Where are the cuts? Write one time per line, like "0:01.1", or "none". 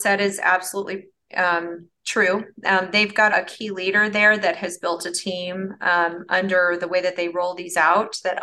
0:03.3